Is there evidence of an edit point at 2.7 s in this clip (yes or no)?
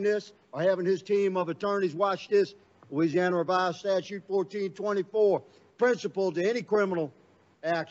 yes